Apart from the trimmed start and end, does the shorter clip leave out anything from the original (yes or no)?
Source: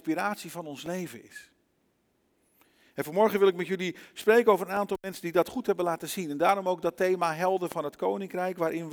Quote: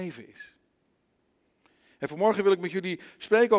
no